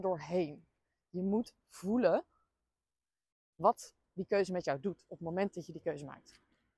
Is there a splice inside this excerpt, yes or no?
no